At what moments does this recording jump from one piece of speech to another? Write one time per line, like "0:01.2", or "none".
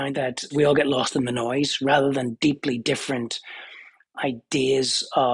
none